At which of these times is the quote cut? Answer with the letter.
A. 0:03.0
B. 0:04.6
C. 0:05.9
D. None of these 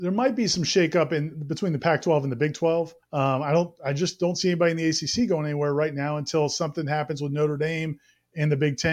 A